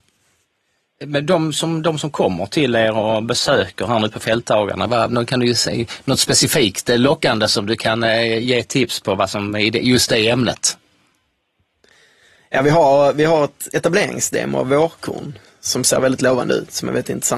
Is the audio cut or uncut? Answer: cut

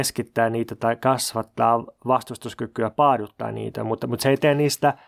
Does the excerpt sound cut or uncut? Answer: uncut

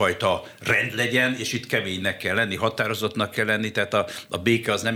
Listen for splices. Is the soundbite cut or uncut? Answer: uncut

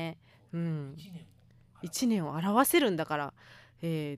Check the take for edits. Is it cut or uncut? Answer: uncut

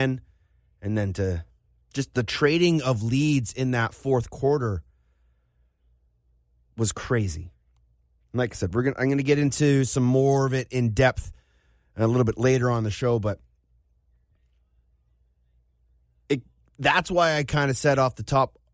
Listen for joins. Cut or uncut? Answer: uncut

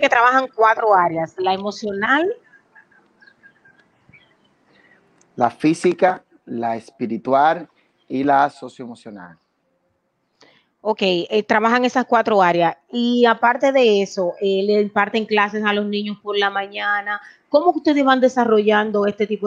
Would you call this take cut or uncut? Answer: uncut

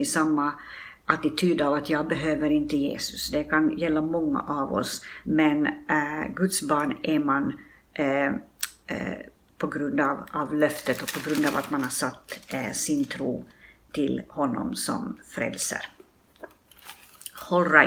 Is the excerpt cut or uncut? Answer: cut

